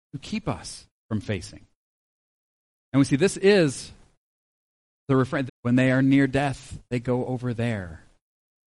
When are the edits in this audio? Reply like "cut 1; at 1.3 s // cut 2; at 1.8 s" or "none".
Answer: cut 1; at 2.8 s // cut 2; at 5.5 s